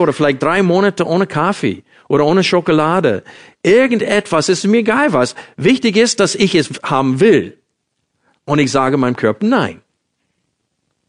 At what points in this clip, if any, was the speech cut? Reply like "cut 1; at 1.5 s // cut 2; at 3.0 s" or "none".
none